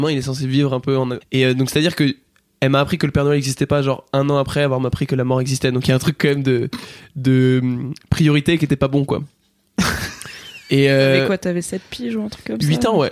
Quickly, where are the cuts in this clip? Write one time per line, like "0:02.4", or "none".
0:01.2